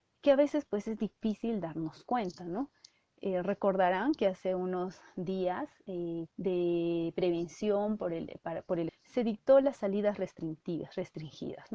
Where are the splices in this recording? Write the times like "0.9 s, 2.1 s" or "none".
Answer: 6.3 s, 8.9 s